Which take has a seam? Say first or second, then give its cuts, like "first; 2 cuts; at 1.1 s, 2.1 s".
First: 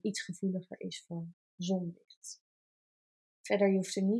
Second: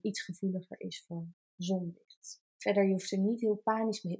second; 1 cut; at 2.5 s